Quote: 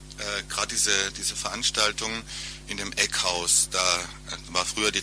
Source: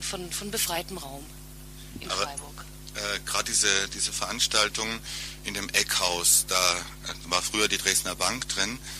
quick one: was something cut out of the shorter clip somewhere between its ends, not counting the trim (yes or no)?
no